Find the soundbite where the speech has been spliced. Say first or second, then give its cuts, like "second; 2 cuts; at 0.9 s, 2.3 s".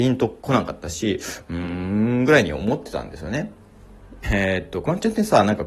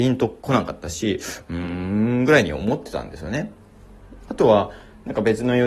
first; 1 cut; at 4.2 s